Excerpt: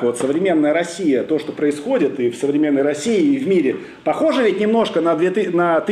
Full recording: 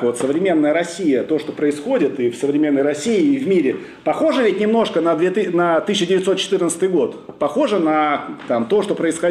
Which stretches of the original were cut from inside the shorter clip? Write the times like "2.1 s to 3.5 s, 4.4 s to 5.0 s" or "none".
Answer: none

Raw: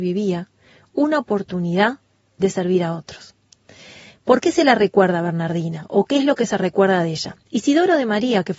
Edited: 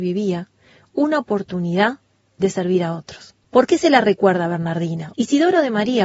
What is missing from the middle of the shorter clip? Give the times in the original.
3.4 s to 4.2 s, 5.9 s to 7.5 s

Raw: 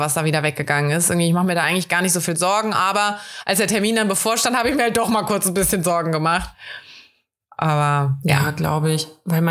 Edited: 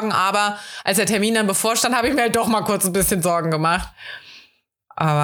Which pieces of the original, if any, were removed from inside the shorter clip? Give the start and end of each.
none

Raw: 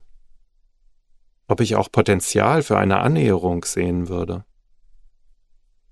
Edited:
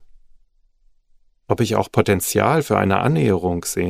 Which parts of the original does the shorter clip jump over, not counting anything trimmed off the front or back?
none

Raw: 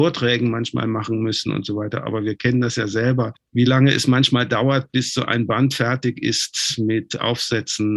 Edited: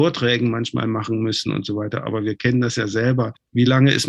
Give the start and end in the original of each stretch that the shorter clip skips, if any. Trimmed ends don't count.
none

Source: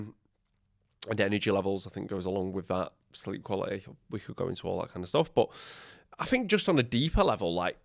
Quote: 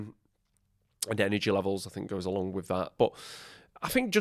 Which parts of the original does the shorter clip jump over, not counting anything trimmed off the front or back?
3.0 s to 5.3 s

